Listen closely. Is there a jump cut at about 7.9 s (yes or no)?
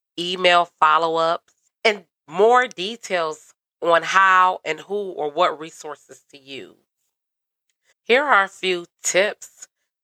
yes